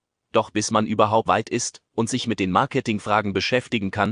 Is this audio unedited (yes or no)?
no